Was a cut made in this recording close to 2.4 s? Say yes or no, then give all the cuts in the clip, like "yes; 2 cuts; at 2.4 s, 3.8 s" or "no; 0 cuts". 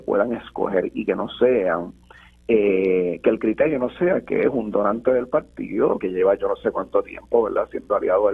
no; 1 cut; at 6.0 s